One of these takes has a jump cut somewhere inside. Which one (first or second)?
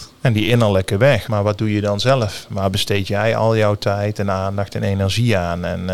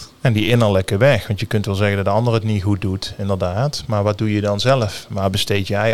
first